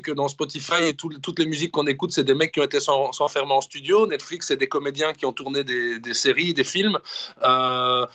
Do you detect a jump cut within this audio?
no; 0 cuts

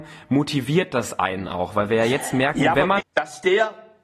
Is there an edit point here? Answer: yes; 1 cut; at 3.0 s

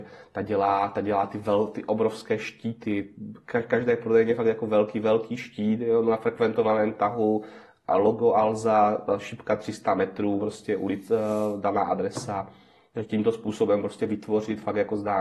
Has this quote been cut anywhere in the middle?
no; 0 cuts

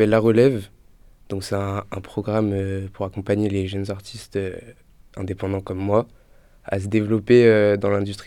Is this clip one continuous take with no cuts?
yes; 0 cuts

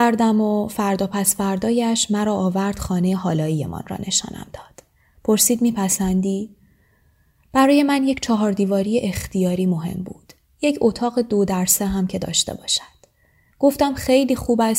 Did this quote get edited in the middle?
no; 0 cuts

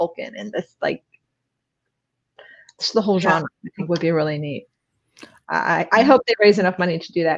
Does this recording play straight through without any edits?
no; 1 cut; at 5.4 s

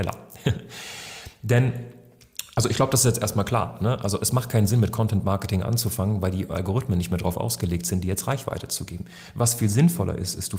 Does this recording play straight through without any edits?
yes; 0 cuts

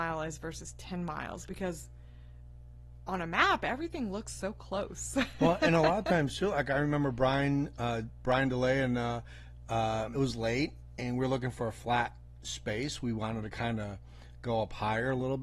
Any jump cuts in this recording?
yes; 1 cut; at 10.1 s

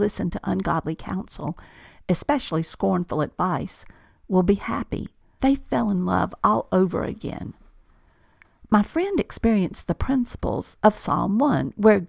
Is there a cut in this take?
yes; 1 cut; at 5.4 s

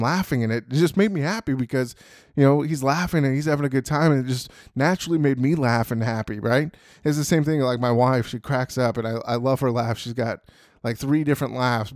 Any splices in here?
no; 0 cuts

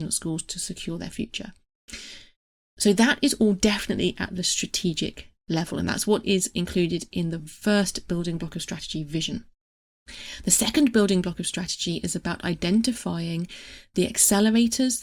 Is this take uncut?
yes; 0 cuts

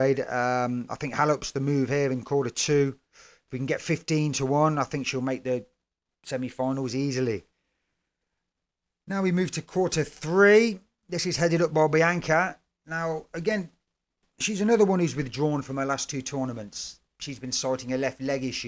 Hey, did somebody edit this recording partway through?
no; 0 cuts

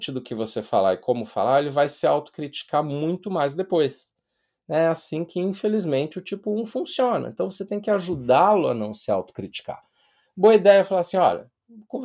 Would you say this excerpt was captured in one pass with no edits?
yes; 0 cuts

